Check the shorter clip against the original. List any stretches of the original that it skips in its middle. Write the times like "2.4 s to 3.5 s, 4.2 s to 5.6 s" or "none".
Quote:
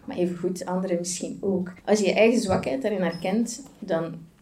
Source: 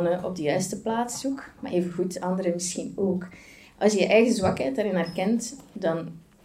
3.3 s to 3.7 s